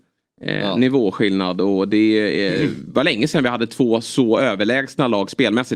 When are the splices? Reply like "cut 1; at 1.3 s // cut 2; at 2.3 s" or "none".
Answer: none